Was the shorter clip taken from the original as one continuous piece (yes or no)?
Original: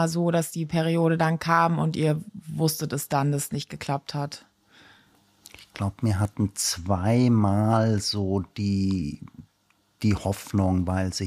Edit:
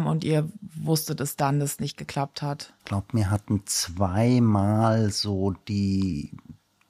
no